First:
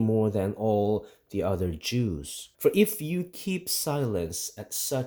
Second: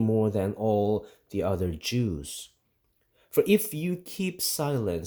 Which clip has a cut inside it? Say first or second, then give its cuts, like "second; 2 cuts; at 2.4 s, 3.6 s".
first; 1 cut; at 2.5 s